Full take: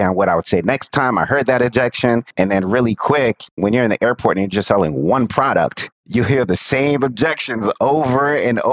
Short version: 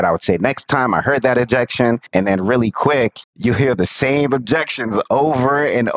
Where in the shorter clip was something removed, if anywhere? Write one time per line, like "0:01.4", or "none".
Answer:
0:03.2

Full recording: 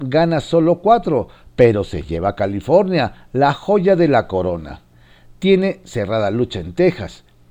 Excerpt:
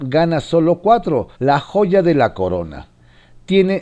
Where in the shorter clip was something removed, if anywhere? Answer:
0:01.4

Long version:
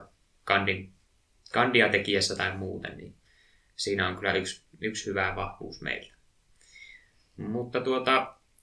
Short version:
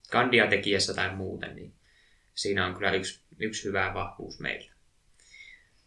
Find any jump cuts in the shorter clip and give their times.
none

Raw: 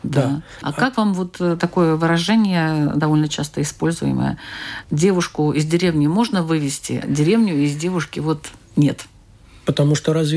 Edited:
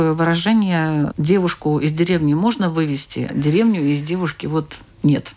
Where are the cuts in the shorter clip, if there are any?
0:01.1

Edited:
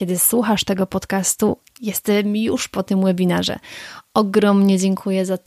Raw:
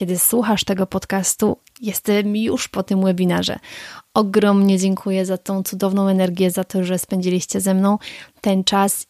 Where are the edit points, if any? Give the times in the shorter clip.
none

